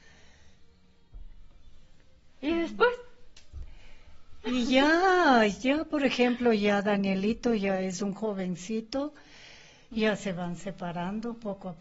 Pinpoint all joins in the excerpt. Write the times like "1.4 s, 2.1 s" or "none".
9.9 s